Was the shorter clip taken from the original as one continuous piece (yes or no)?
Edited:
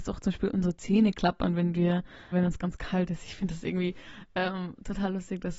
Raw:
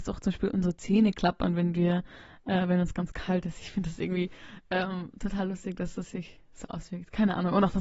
no